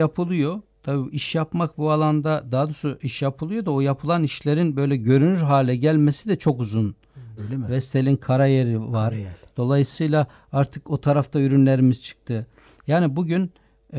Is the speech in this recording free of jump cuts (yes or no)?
no